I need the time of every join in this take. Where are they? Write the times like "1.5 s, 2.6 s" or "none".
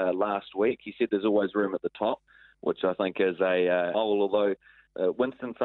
3.9 s